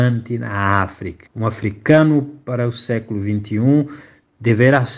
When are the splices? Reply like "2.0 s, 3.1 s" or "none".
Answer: 1.3 s